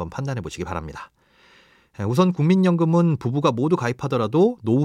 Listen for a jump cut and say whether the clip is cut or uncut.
uncut